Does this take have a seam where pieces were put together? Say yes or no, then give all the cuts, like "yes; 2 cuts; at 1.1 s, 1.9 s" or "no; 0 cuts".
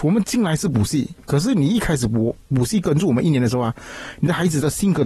no; 0 cuts